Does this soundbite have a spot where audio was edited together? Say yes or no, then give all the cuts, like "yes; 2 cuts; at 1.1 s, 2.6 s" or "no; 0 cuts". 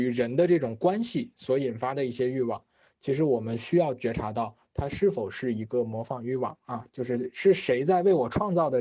no; 0 cuts